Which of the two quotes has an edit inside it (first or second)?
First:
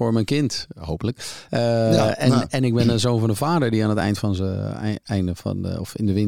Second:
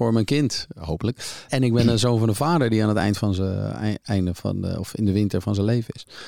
second